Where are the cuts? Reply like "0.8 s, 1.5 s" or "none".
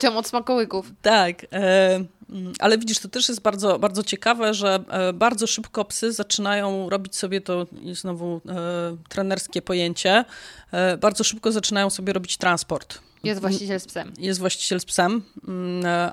13.2 s